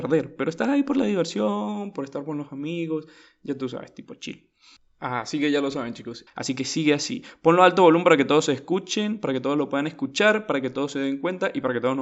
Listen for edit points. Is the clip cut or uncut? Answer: cut